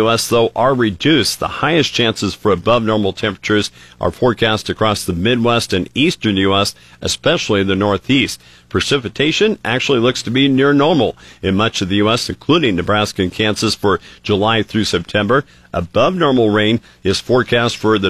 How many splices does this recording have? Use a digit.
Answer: 0